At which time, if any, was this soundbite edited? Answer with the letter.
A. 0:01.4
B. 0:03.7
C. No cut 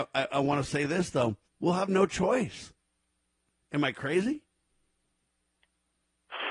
A